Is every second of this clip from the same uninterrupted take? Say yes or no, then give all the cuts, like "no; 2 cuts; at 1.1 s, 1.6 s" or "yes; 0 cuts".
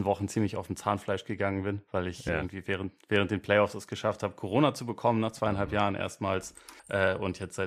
yes; 0 cuts